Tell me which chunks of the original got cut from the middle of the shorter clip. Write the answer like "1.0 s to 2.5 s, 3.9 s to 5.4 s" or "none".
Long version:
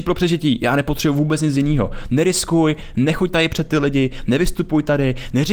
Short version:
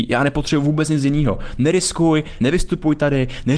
2.9 s to 4.3 s